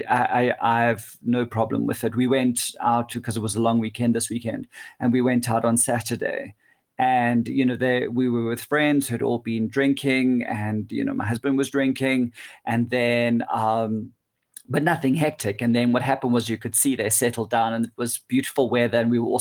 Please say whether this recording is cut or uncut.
uncut